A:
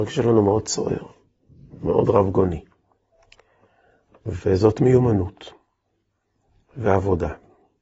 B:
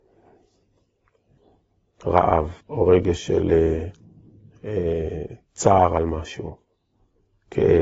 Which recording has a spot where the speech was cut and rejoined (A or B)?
B